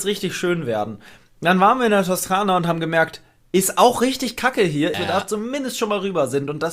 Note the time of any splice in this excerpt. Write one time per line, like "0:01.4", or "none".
0:04.9